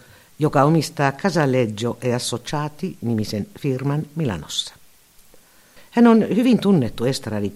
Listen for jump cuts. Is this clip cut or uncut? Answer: cut